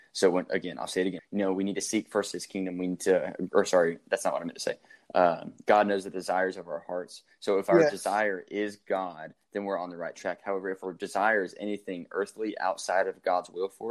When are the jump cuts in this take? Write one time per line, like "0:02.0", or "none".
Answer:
0:01.2